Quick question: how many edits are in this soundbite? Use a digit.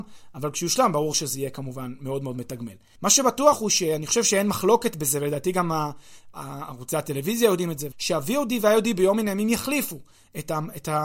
2